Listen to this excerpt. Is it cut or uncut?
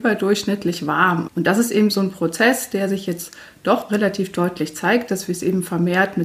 cut